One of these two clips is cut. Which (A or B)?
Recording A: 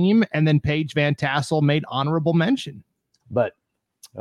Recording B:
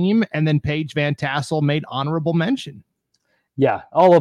A